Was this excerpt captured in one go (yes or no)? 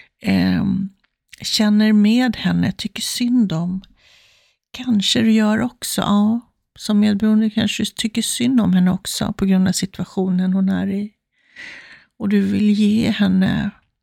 yes